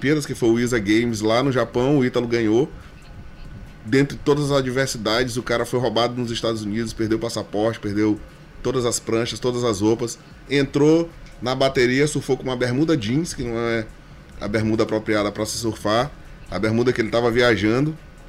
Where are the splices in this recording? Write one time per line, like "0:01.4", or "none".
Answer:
0:10.4